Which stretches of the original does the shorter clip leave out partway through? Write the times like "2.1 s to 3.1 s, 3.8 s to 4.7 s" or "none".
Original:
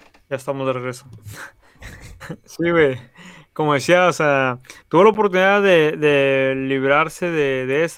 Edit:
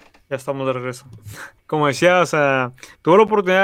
1.6 s to 3.4 s